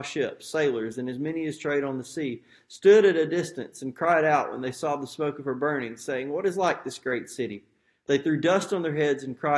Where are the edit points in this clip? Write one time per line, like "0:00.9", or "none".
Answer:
none